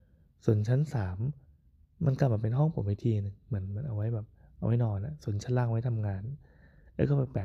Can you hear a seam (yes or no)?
no